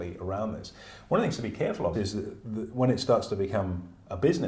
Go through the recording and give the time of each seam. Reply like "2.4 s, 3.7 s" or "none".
1.9 s